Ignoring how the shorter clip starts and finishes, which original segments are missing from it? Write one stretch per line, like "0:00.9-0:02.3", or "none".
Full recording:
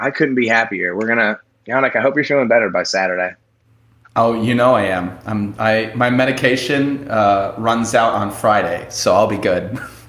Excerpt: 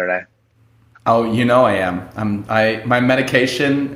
none